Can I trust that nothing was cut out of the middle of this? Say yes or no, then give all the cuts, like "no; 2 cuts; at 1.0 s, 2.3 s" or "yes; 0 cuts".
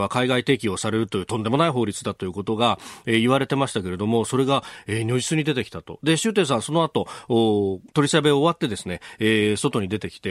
no; 1 cut; at 7.9 s